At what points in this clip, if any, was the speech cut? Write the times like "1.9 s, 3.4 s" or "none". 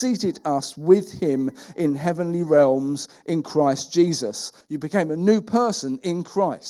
4.6 s